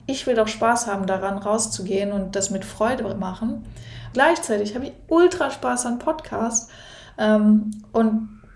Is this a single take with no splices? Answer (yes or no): no